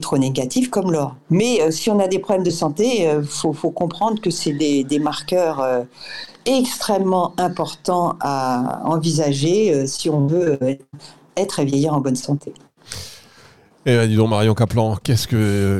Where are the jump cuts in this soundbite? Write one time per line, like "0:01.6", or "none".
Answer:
0:01.3